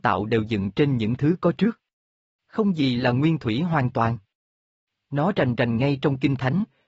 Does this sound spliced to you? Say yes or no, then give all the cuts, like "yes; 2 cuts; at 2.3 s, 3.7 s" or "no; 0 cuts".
no; 0 cuts